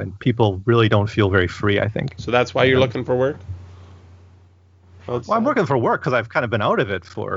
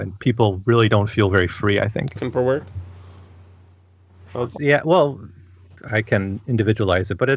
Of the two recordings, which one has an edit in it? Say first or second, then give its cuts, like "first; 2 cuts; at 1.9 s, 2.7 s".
second; 3 cuts; at 2.2 s, 4.6 s, 5.9 s